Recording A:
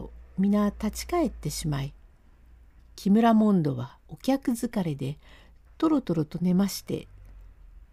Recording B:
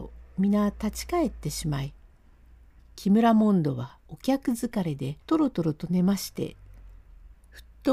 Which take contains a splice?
B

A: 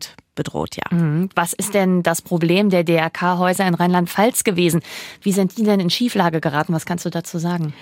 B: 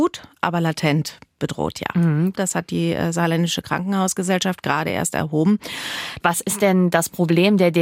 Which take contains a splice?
B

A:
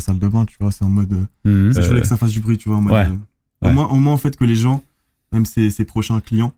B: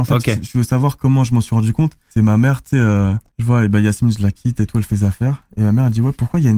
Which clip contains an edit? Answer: A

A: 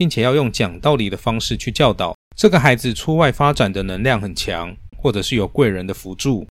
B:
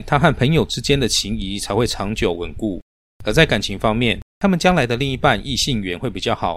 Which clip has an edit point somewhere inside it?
A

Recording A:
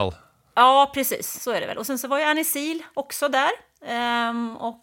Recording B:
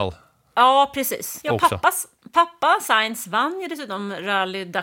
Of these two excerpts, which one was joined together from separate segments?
B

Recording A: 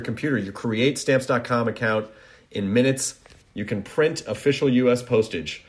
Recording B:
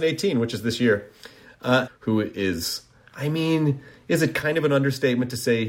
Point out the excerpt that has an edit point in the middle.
B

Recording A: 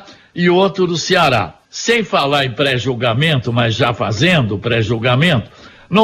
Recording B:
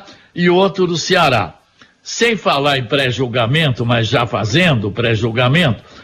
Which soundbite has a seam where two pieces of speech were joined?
A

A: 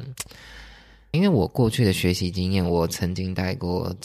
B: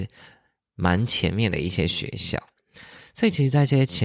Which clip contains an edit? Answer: A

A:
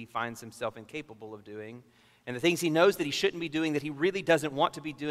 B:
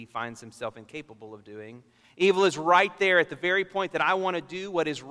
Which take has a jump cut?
B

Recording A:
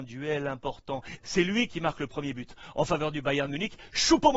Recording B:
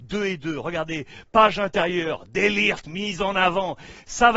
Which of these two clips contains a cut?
A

